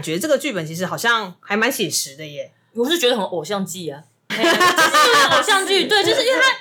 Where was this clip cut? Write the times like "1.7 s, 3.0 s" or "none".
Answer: 4.3 s